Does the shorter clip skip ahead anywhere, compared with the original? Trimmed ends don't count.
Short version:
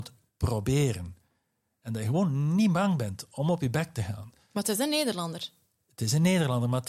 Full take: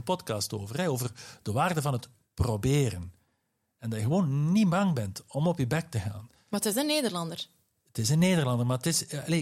no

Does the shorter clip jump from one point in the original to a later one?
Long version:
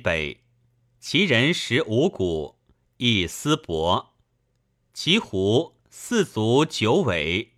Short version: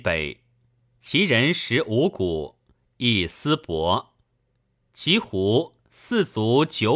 no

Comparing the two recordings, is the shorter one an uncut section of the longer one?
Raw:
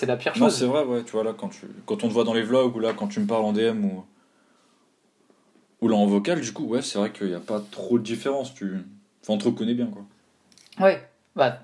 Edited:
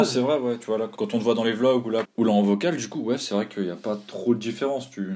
no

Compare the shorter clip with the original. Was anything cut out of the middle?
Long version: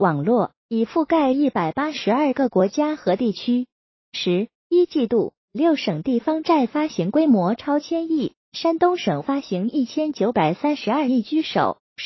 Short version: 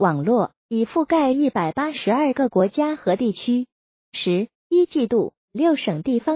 no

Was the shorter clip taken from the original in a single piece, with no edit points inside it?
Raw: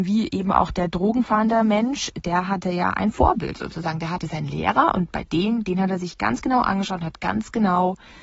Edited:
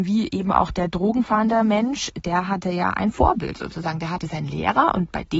yes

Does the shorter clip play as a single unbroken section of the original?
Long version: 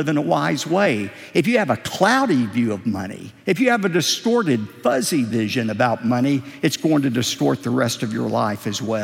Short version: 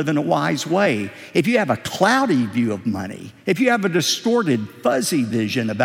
yes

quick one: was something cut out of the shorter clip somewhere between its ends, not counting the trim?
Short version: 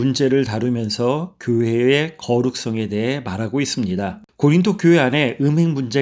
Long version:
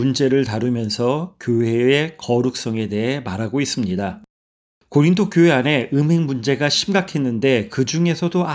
yes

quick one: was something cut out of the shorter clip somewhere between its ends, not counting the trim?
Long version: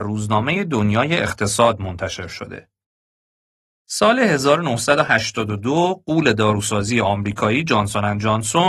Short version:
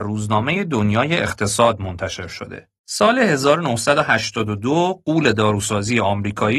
yes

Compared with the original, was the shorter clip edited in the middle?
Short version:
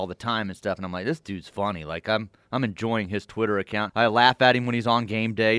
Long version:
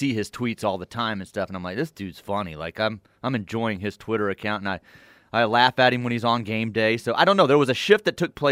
yes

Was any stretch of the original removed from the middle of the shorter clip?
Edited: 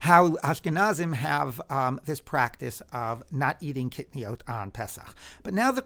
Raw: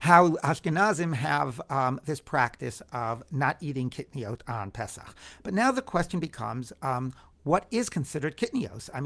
no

